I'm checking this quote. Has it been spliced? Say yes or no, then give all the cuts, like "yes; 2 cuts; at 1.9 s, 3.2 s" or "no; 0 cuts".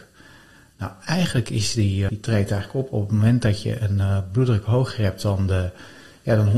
yes; 1 cut; at 2.1 s